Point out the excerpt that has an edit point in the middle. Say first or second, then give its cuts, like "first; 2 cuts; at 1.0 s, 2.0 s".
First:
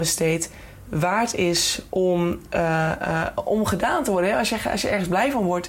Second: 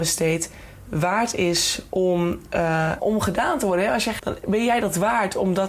second; 2 cuts; at 3.0 s, 4.2 s